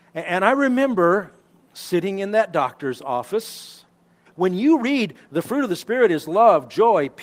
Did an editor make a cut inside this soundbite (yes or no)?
yes